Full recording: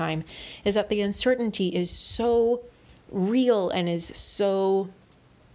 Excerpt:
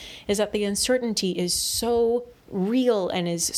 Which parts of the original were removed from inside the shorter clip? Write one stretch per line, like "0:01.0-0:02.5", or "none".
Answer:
0:02.8-0:03.0